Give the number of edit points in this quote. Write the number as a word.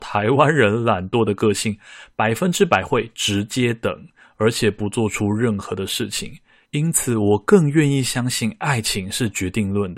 one